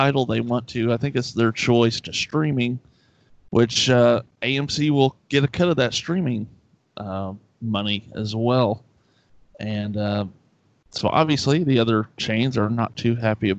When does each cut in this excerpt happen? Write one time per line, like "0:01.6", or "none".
none